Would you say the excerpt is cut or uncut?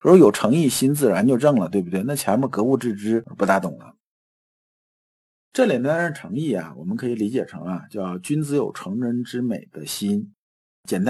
uncut